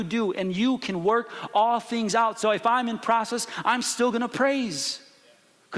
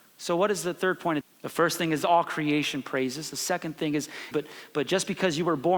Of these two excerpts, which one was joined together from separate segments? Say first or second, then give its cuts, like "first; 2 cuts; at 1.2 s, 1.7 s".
second; 2 cuts; at 1.2 s, 4.3 s